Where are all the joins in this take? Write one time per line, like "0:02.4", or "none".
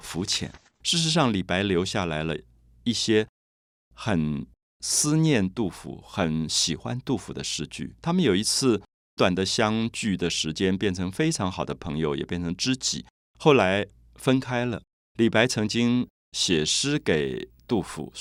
0:09.2